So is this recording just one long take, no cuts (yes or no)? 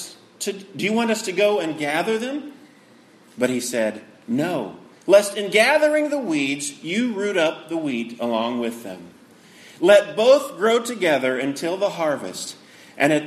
yes